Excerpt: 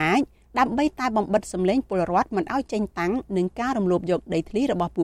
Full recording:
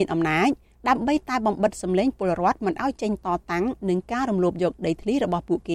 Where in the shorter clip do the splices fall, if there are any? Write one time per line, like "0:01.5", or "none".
0:02.9

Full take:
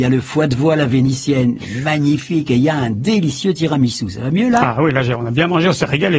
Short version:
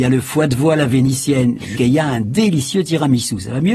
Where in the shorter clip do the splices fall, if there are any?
0:01.8

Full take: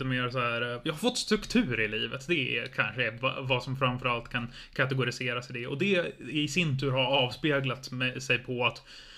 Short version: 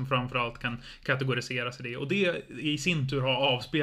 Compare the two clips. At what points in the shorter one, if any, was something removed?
none

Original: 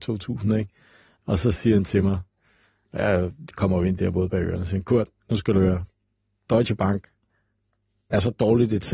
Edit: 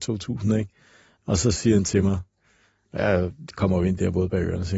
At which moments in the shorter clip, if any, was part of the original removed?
none

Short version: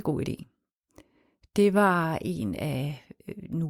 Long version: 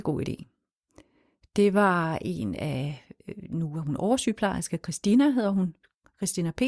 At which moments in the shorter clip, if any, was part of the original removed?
none

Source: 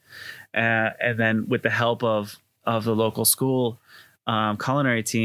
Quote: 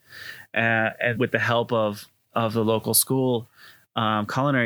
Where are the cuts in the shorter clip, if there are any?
0:01.2

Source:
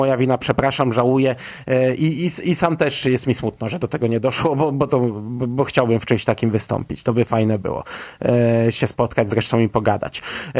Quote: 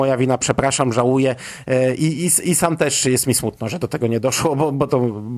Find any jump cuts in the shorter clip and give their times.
none

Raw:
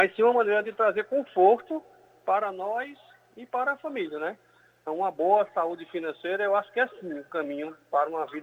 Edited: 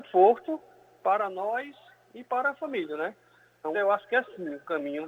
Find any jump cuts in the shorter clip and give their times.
0:03.7

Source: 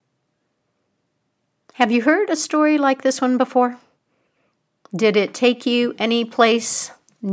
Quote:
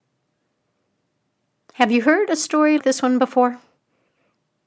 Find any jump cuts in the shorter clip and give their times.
0:02.8

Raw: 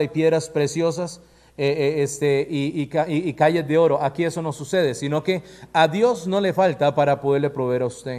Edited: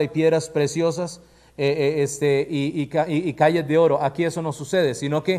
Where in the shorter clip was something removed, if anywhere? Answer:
none

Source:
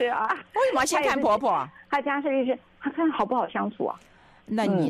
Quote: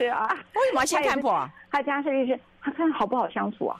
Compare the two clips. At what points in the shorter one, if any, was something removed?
0:01.2

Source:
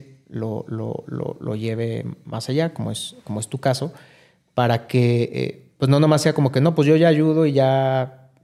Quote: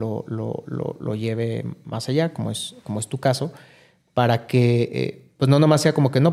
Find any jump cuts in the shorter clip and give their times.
none

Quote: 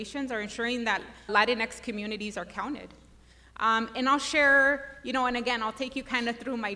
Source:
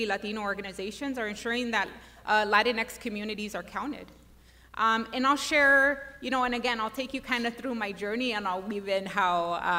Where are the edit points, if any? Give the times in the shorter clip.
0:01.3

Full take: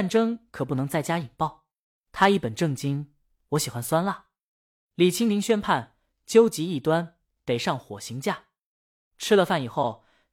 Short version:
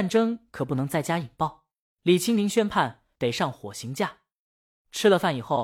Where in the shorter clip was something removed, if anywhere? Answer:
0:01.8
0:03.1

